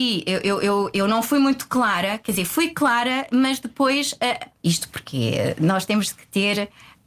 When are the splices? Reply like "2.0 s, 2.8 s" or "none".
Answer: 4.6 s